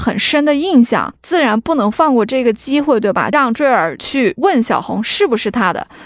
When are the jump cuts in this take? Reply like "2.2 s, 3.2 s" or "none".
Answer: 3.3 s